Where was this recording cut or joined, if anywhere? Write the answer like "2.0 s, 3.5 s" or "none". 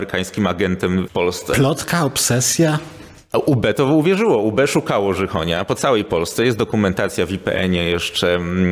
1.1 s